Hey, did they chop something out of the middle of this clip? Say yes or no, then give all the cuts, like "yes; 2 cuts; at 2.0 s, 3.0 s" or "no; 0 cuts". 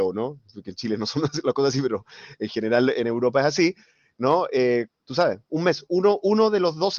yes; 1 cut; at 4.9 s